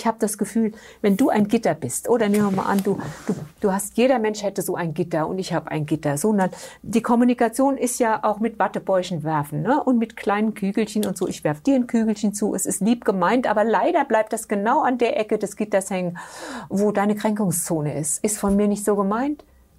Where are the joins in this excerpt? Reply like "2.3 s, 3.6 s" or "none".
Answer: none